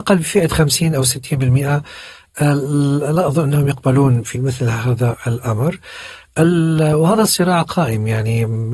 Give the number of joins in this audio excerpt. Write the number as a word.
one